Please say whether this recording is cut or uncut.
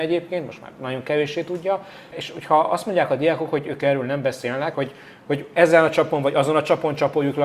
cut